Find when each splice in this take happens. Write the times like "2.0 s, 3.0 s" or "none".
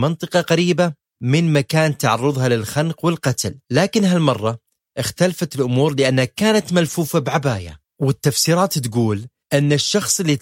3.6 s